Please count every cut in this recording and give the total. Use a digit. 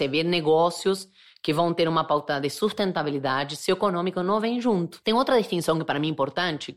1